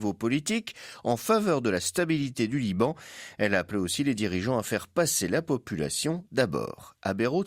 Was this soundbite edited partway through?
no; 0 cuts

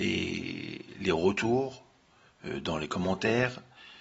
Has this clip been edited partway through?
no; 0 cuts

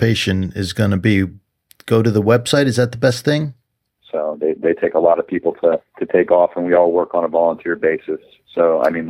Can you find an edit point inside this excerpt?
yes; 2 cuts; at 4.0 s, 5.9 s

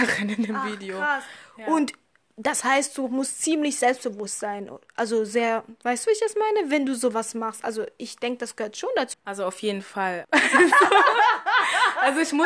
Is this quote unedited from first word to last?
no; 2 cuts; at 9.1 s, 10.2 s

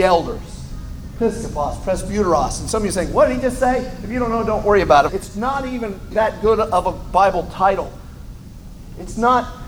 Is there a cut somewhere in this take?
yes; 2 cuts; at 5.1 s, 6.1 s

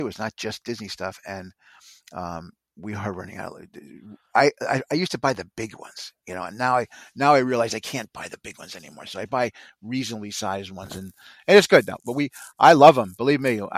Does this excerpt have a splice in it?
no; 0 cuts

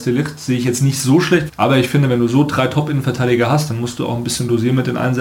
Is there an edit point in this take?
yes; 1 cut; at 1.5 s

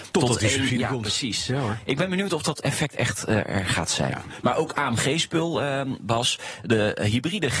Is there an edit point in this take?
yes; 1 cut; at 4.4 s

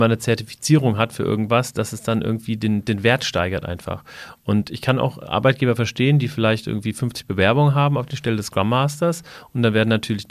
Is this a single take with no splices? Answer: yes; 0 cuts

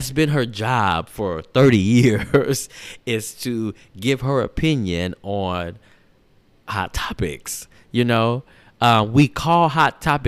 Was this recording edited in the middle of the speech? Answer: no; 0 cuts

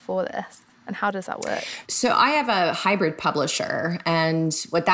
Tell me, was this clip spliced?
yes; 1 cut; at 1.8 s

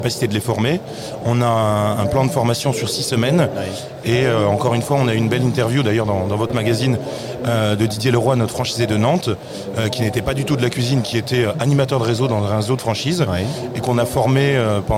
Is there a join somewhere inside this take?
no; 0 cuts

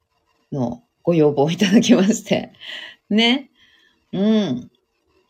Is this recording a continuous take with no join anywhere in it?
yes; 0 cuts

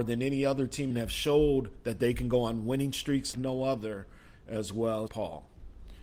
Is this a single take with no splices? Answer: no; 3 cuts; at 0.9 s, 3.3 s, 5.1 s

